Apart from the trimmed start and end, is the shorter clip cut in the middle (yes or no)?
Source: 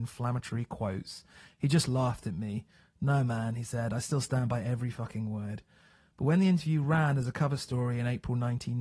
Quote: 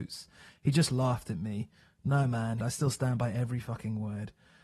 yes